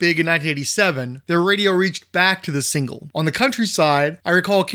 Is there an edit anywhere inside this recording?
yes; 1 cut; at 3.1 s

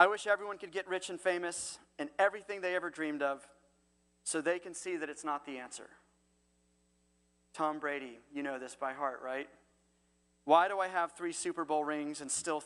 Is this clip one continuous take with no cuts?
yes; 0 cuts

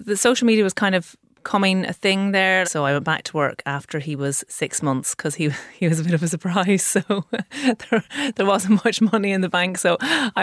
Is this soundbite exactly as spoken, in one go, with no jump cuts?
no; 1 cut; at 2.6 s

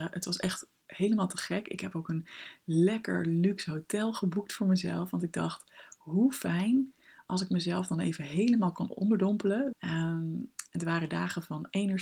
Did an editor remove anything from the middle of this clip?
yes; 1 cut; at 9.7 s

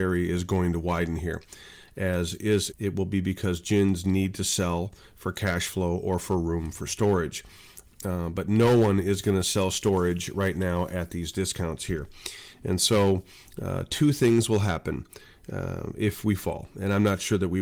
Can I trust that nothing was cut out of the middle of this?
no; 1 cut; at 2.7 s

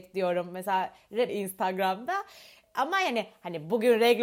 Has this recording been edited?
yes; 1 cut; at 1.3 s

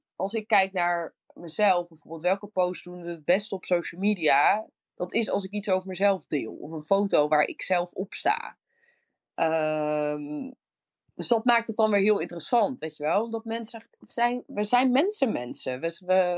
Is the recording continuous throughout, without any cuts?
yes; 0 cuts

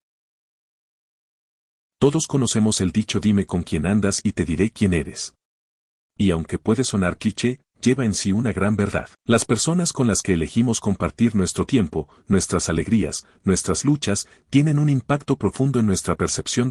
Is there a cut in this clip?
yes; 1 cut; at 9.1 s

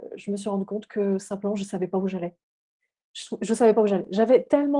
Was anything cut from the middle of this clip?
no; 0 cuts

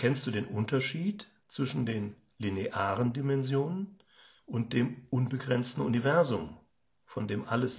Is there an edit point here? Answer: yes; 1 cut; at 4.4 s

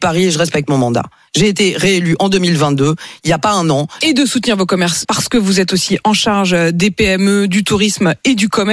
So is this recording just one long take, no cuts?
no; 2 cuts; at 4.0 s, 5.0 s

